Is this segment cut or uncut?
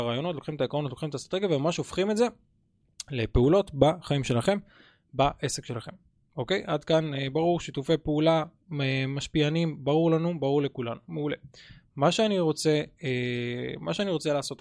uncut